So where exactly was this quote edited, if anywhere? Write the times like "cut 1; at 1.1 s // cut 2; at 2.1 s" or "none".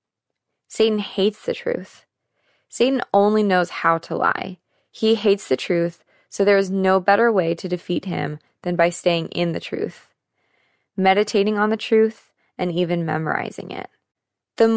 none